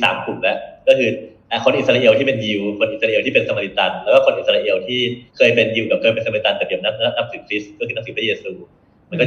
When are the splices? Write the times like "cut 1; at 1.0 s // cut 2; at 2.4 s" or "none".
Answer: cut 1; at 5.3 s